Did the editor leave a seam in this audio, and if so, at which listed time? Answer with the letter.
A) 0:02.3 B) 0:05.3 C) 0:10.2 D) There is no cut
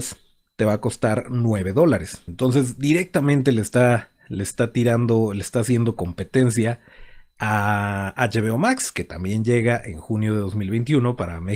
A